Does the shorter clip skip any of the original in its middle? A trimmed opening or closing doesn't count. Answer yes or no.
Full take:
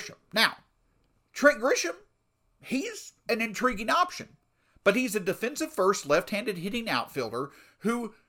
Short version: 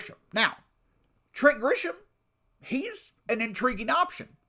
no